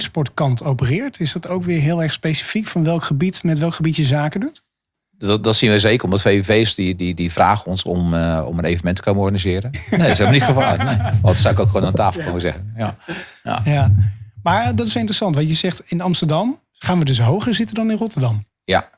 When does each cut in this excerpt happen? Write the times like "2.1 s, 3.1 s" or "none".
9.7 s